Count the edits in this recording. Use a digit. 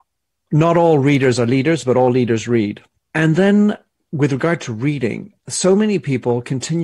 1